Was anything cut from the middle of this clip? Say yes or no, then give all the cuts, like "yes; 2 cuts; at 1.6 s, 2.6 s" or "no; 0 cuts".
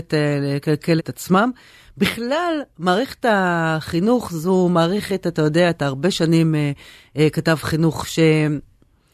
yes; 1 cut; at 1.0 s